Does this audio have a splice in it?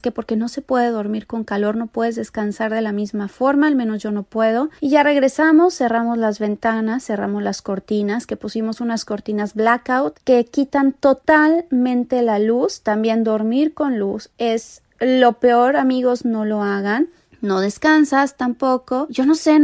yes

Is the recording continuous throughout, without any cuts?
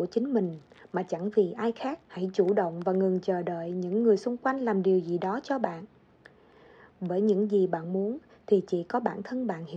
no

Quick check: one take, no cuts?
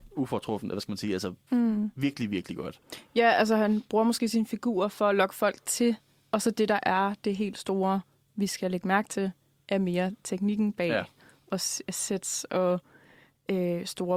yes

